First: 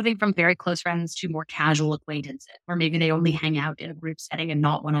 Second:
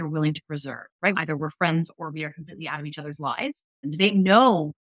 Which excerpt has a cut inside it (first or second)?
second